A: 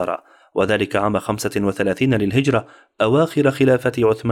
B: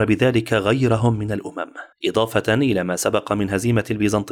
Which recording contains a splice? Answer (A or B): B